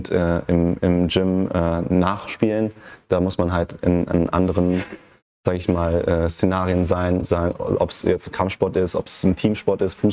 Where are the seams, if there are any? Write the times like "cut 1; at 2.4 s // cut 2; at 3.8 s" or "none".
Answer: none